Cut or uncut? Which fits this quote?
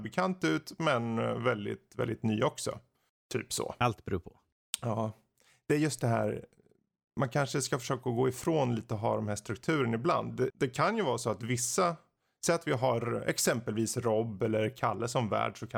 cut